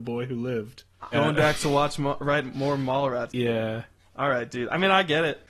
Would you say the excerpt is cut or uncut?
cut